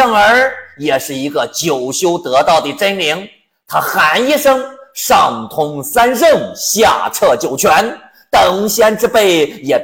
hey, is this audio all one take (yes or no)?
yes